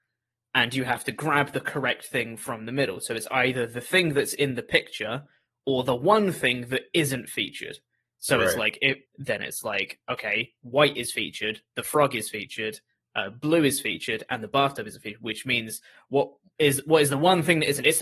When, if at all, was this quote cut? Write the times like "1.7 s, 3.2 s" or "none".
9.0 s